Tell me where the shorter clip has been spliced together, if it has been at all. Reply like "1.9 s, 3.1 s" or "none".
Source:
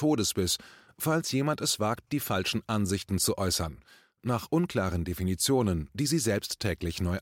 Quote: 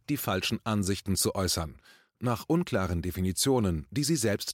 none